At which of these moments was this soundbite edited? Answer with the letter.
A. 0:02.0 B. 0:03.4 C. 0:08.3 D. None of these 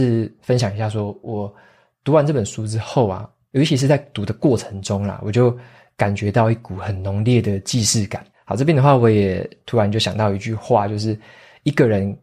C